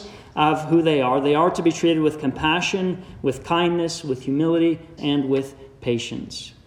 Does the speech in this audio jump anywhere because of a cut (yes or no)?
yes